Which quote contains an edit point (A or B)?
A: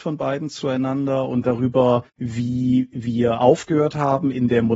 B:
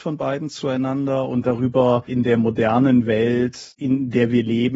B